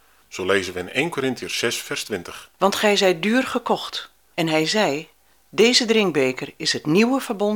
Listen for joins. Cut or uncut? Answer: cut